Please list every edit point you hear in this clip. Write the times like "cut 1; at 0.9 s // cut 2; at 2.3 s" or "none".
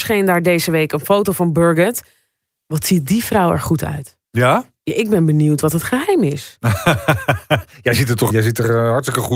cut 1; at 8.3 s